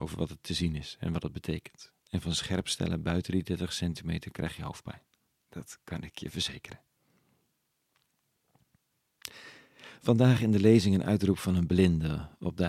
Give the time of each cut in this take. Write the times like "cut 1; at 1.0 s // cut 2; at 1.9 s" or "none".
cut 1; at 2.0 s